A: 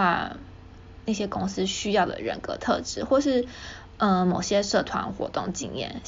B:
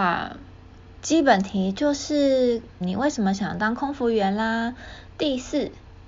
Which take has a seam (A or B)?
B